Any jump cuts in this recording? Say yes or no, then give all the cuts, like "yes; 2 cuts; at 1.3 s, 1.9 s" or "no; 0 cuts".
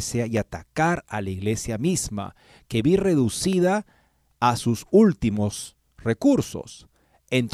no; 0 cuts